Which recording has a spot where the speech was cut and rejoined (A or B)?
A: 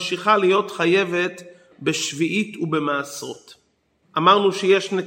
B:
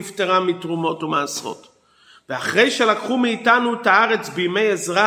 A